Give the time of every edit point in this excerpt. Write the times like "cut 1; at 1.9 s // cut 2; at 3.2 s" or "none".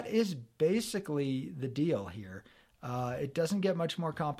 none